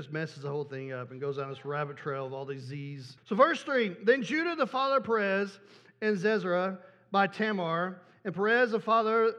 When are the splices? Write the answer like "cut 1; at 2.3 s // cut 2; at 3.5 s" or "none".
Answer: cut 1; at 3.2 s